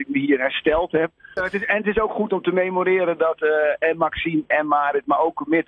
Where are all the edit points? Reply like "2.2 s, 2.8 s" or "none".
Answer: 1.4 s